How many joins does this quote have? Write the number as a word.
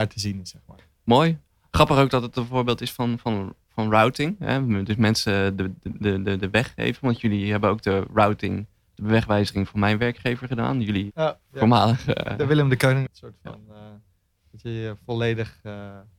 two